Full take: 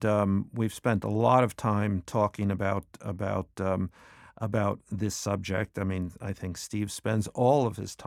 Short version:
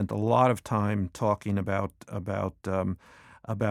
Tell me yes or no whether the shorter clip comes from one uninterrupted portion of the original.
yes